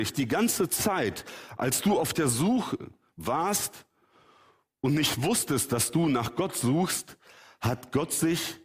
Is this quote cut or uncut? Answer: uncut